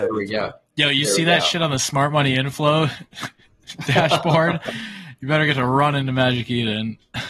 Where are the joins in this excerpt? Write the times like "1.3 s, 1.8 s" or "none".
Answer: none